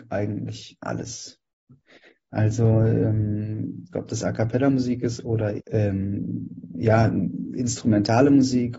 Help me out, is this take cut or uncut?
cut